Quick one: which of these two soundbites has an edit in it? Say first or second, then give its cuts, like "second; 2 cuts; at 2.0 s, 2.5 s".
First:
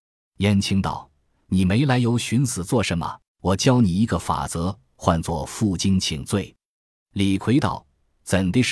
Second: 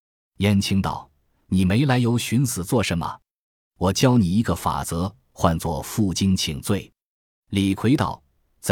first; 1 cut; at 3.3 s